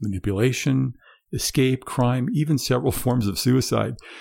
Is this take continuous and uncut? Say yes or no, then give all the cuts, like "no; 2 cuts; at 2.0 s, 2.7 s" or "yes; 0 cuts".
yes; 0 cuts